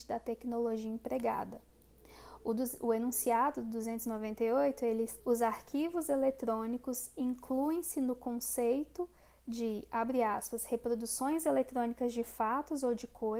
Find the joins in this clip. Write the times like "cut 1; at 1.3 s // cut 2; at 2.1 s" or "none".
cut 1; at 5.2 s